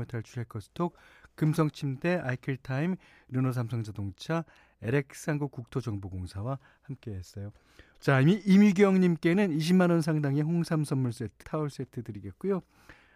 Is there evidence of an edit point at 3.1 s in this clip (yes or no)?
no